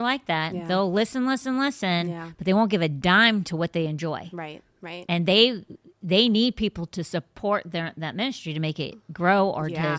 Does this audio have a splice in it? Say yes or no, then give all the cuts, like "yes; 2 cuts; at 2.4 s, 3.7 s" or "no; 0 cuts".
no; 0 cuts